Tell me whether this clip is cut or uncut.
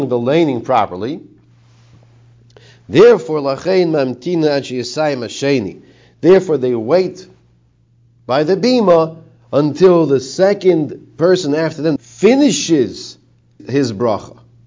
cut